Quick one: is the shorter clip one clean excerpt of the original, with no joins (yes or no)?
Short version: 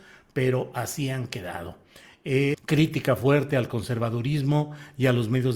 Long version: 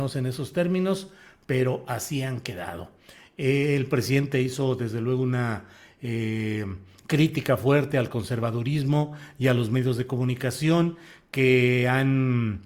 no